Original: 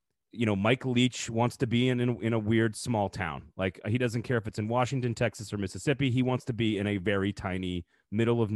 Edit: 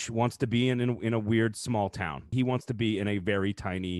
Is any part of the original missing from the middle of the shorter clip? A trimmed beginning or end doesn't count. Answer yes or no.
yes